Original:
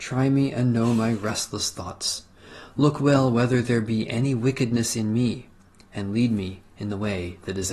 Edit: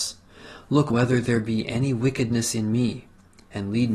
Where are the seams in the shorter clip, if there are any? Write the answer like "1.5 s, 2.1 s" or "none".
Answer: 0.9 s